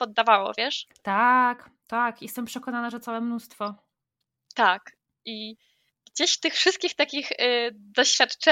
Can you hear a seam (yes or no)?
no